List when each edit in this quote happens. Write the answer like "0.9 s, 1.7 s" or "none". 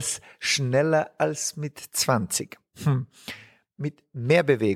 none